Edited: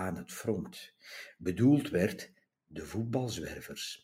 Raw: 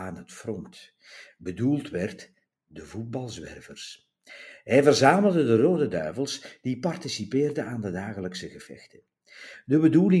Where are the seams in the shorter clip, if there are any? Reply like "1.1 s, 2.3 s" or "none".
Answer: none